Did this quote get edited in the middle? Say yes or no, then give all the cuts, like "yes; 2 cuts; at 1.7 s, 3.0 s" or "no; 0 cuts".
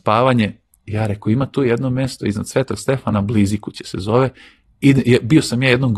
no; 0 cuts